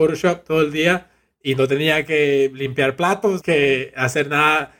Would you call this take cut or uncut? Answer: cut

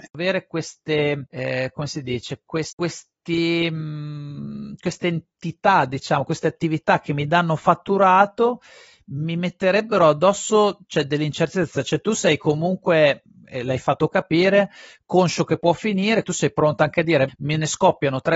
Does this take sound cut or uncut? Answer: cut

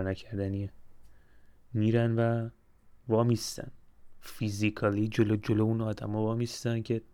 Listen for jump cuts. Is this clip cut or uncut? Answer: uncut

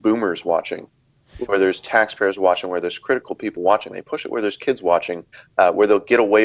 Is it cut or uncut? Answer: uncut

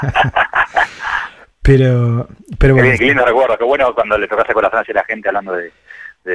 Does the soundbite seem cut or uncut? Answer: uncut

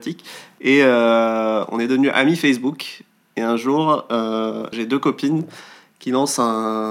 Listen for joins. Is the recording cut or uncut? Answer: cut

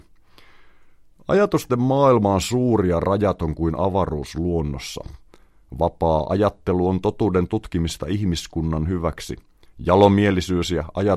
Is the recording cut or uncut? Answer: uncut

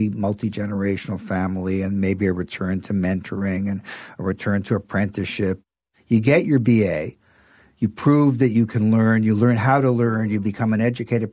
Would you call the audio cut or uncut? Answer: uncut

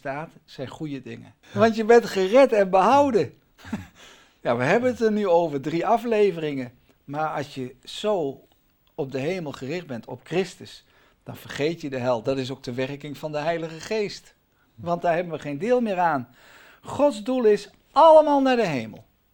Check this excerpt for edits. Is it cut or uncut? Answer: cut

